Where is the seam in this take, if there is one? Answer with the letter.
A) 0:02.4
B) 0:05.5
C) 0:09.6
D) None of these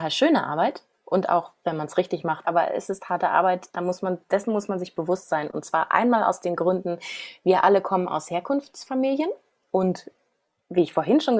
A